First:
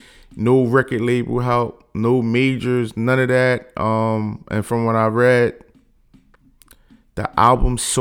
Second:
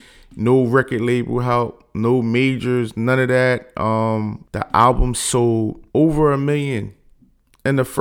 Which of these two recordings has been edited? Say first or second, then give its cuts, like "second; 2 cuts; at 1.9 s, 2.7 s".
second; 2 cuts; at 4.4 s, 5.9 s